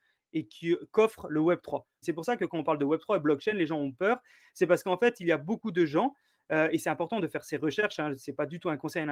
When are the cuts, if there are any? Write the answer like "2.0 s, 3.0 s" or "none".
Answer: 2.0 s